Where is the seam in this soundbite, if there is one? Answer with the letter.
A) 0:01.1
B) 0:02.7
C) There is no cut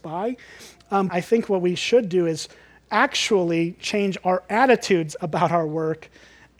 A